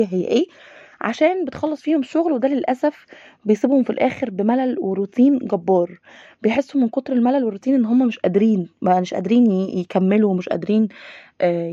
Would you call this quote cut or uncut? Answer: uncut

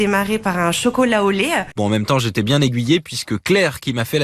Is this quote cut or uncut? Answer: cut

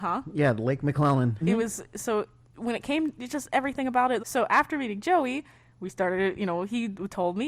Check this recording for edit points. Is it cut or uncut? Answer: cut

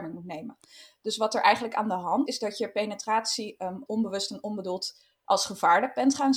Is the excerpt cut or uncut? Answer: cut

